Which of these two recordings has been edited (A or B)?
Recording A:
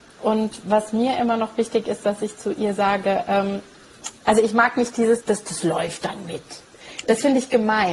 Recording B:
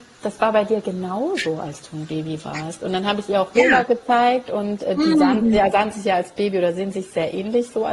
A